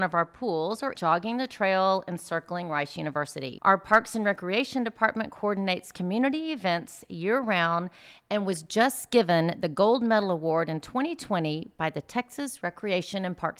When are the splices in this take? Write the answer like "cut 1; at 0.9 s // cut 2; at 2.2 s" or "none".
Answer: cut 1; at 0.9 s